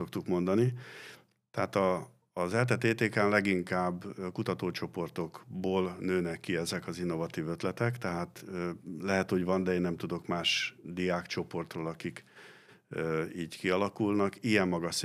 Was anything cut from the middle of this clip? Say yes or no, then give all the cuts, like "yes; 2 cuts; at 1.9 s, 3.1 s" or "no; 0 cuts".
no; 0 cuts